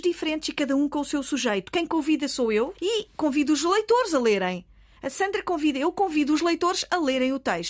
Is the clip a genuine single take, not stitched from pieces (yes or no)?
no